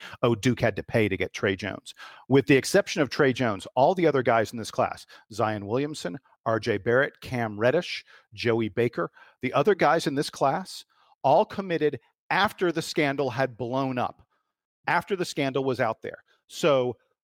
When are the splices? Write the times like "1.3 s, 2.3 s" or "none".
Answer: none